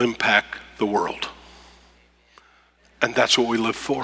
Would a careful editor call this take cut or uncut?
uncut